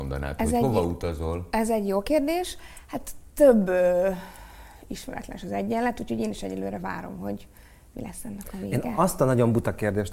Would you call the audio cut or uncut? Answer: uncut